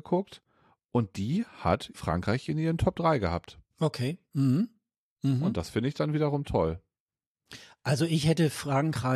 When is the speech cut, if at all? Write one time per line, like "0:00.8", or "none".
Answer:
none